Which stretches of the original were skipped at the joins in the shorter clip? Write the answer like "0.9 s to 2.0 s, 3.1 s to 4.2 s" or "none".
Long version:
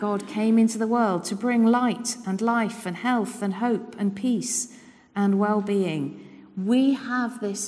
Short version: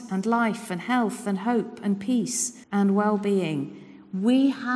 4.8 s to 5.1 s